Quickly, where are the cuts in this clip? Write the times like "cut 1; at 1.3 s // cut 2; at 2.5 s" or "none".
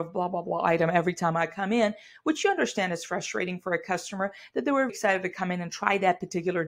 cut 1; at 4.9 s